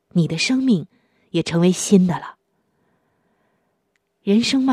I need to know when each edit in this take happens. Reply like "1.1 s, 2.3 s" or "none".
none